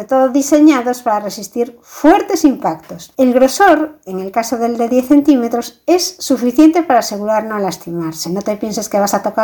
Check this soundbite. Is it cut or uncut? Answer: uncut